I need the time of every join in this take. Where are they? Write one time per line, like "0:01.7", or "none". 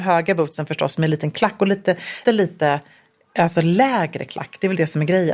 0:02.2